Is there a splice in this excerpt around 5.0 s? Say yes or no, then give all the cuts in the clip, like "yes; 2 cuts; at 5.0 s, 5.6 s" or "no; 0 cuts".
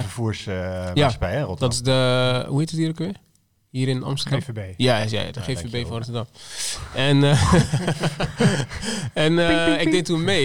no; 0 cuts